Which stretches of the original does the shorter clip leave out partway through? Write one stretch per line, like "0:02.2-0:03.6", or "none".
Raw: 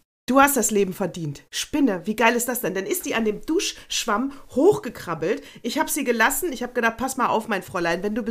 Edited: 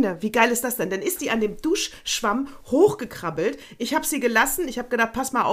none